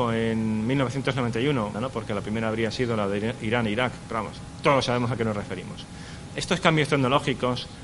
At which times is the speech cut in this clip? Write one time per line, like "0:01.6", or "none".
0:01.7
0:06.3